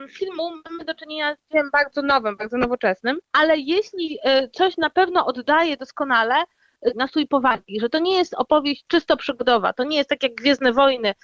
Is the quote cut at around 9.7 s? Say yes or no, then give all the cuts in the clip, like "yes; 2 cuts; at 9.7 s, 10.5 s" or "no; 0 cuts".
no; 2 cuts; at 3.2 s, 6.9 s